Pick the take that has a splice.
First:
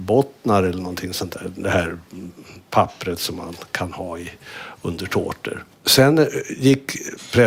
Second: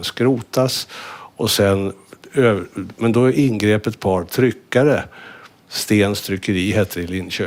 first; 1 cut; at 5.7 s

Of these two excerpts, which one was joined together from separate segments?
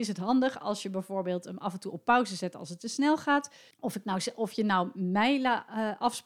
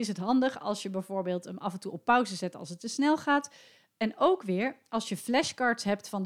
first; 1 cut; at 3.7 s

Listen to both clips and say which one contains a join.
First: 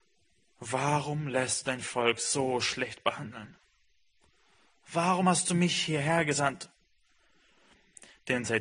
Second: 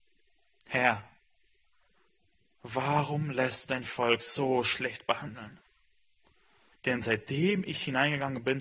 second; 1 cut; at 6.7 s

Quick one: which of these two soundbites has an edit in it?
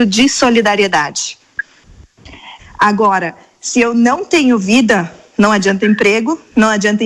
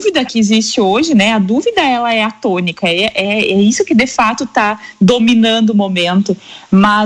first; 1 cut; at 2.6 s

